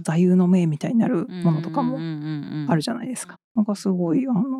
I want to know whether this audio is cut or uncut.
cut